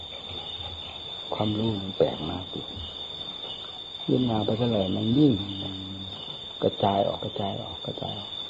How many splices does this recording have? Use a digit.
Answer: 1